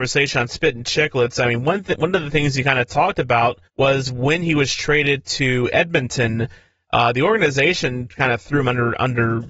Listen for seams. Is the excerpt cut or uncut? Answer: cut